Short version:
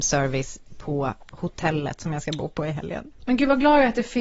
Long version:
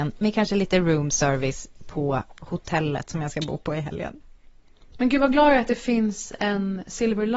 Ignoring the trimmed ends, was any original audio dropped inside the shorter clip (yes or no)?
yes